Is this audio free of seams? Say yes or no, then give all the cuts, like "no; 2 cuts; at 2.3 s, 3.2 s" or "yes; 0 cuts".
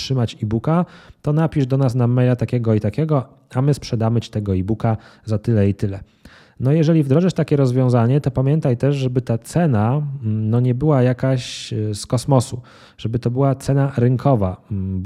yes; 0 cuts